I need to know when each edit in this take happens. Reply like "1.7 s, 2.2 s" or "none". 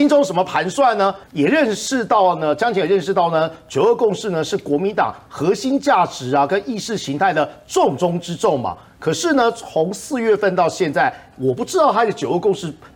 1.2 s, 11.3 s